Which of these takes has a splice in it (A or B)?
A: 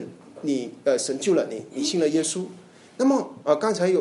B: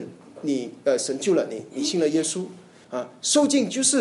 B